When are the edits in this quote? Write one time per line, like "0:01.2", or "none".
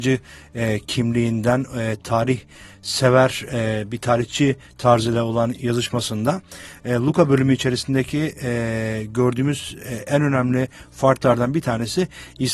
none